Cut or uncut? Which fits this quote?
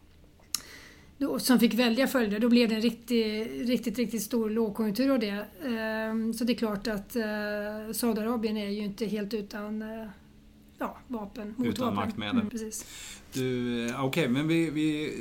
cut